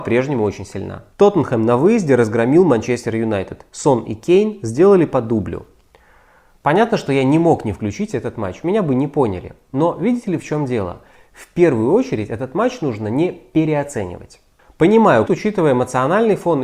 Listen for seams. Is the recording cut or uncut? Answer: cut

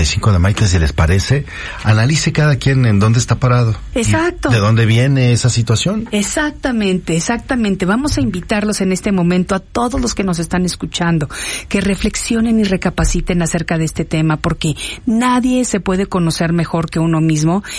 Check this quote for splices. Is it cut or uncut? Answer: uncut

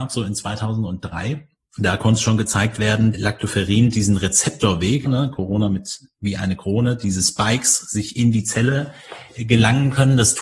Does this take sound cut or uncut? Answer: cut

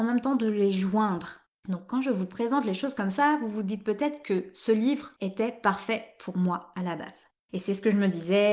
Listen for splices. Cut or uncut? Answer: cut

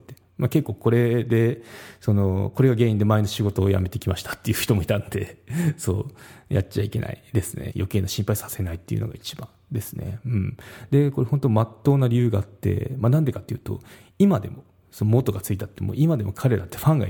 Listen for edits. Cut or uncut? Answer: cut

